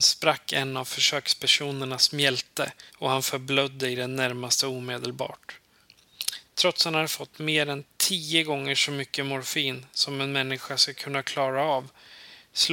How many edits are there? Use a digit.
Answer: 2